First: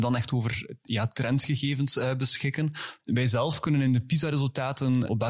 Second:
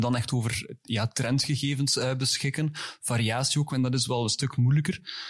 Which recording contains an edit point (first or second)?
first